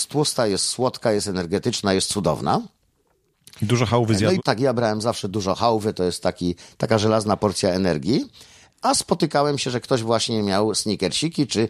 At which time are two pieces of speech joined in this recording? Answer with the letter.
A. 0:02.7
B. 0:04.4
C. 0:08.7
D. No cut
B